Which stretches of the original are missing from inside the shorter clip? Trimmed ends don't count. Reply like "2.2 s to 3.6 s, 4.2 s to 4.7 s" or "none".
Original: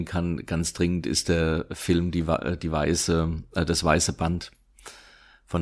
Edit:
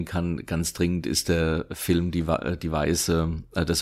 none